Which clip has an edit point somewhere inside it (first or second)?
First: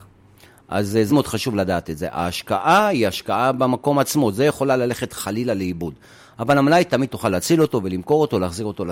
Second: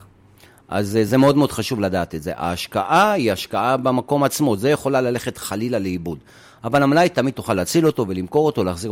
first